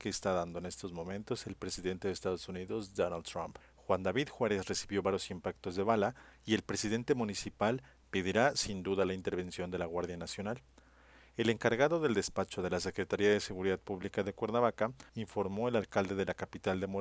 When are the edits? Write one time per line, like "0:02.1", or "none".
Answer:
0:03.6
0:15.1